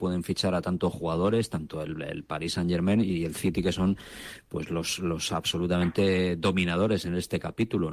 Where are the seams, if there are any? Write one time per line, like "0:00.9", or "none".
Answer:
none